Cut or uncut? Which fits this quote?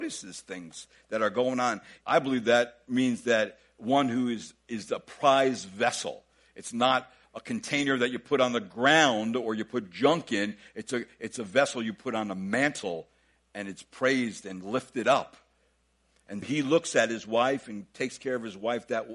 cut